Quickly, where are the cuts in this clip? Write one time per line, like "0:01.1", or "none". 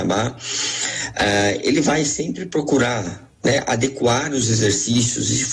none